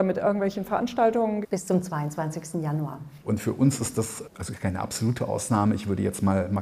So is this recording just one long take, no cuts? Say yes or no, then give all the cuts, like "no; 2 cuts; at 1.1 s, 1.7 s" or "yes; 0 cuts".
no; 3 cuts; at 1.4 s, 3.2 s, 4.2 s